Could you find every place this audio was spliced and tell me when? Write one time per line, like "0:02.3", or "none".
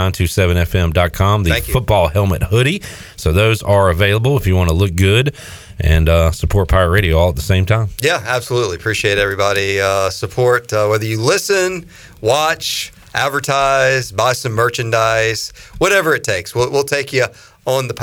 none